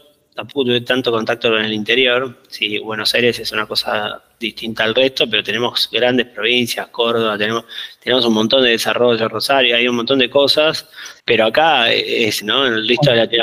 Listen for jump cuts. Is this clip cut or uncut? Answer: cut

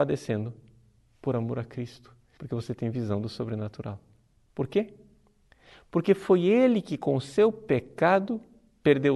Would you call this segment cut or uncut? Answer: cut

